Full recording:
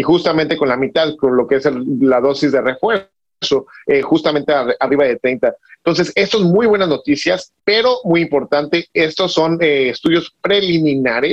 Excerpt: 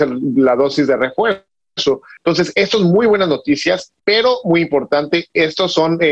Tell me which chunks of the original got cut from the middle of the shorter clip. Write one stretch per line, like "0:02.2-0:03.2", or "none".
0:03.8-0:05.8